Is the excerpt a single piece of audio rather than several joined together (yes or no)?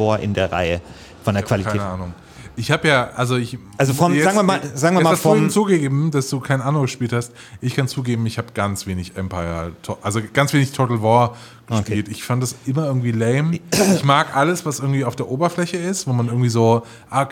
yes